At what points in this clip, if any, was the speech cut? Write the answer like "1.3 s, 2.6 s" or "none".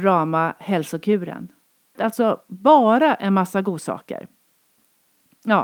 2.0 s